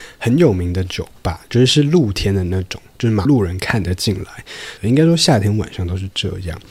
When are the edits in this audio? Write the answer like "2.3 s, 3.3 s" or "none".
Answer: 3.3 s, 4.8 s